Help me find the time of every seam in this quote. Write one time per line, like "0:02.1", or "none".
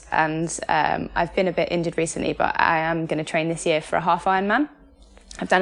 none